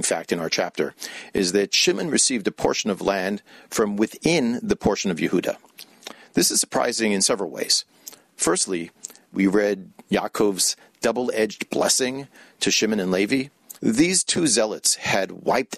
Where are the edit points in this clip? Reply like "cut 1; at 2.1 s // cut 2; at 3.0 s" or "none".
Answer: cut 1; at 9.3 s // cut 2; at 13.8 s